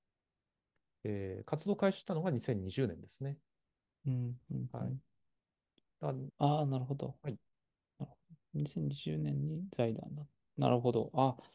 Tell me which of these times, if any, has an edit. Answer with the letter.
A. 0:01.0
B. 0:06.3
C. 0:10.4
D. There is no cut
B